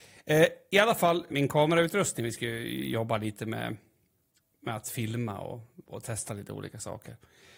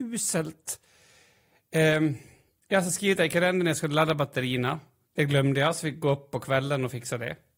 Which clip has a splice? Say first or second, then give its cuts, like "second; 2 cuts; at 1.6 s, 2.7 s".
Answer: first; 2 cuts; at 1.3 s, 5.8 s